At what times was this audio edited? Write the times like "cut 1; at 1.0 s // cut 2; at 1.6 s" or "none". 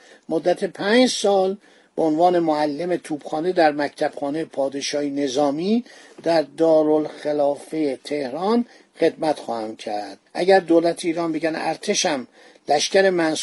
cut 1; at 10.3 s